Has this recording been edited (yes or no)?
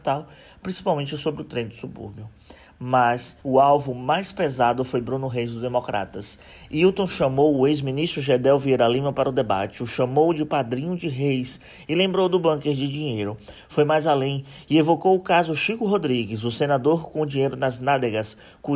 yes